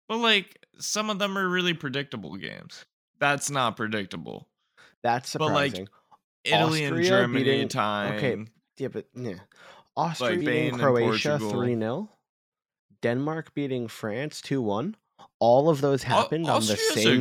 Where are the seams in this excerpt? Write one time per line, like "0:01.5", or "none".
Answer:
0:03.1
0:10.4